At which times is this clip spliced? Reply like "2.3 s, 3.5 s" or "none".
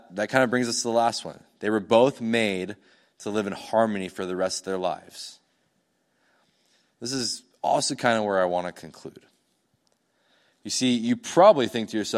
none